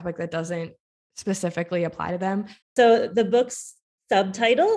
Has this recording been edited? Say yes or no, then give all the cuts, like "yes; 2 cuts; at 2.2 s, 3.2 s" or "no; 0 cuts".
yes; 1 cut; at 2.6 s